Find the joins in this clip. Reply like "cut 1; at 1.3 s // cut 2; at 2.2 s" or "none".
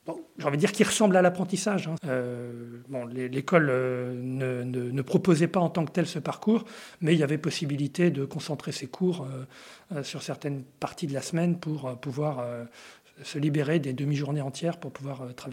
cut 1; at 2.0 s